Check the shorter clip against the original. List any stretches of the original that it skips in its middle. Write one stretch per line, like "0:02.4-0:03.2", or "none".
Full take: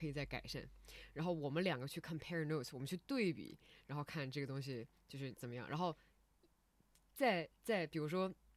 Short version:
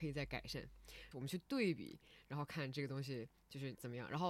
0:01.1-0:02.7